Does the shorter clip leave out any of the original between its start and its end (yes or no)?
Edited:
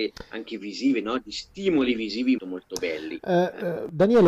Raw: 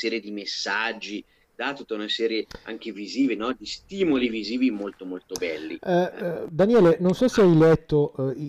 yes